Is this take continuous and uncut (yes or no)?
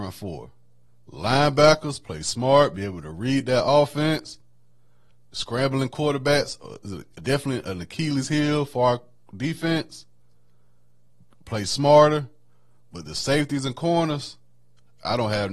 yes